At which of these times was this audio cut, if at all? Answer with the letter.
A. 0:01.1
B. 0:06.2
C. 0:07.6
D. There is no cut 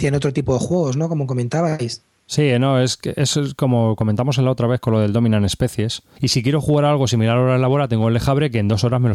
B